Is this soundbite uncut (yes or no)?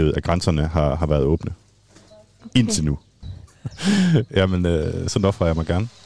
no